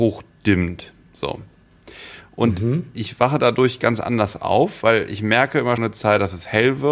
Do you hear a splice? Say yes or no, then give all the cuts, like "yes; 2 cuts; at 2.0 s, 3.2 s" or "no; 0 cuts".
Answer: yes; 1 cut; at 5.8 s